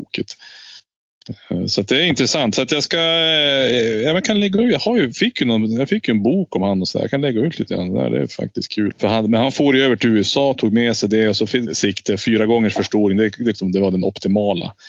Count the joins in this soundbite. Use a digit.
3